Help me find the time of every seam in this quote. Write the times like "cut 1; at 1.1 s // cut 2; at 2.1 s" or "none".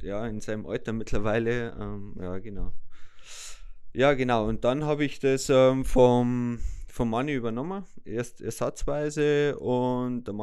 none